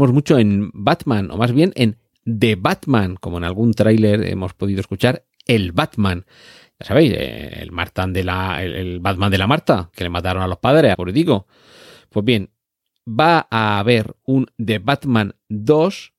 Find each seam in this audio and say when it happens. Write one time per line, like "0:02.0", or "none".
0:09.9
0:10.9